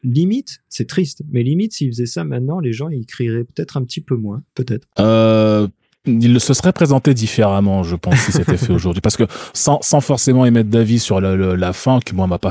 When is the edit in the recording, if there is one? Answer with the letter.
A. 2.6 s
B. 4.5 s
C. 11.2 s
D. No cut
B